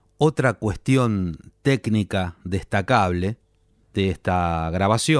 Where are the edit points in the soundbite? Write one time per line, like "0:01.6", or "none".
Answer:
none